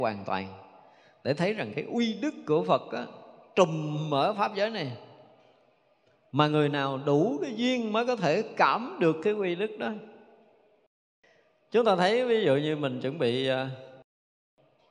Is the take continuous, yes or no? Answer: yes